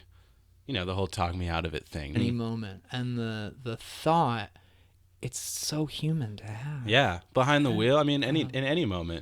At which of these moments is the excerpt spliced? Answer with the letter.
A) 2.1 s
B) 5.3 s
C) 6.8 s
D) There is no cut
A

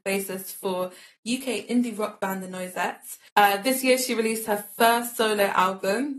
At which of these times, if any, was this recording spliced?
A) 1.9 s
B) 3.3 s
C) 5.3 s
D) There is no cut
B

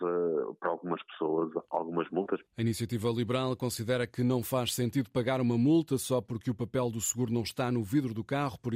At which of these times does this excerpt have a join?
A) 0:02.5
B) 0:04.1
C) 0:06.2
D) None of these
A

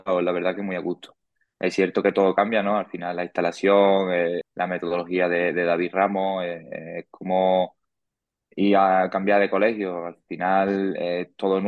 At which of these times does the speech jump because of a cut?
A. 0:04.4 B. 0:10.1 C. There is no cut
A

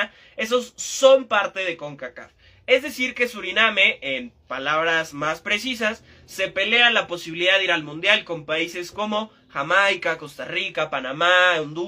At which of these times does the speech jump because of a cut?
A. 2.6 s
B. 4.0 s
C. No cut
C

